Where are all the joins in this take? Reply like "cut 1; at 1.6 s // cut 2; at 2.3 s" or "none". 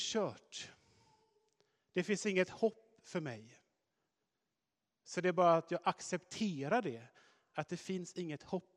none